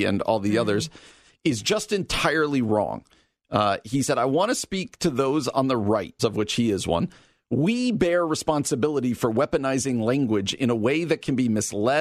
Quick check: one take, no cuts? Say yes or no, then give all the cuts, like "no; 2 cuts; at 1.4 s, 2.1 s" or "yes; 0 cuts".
no; 1 cut; at 6.2 s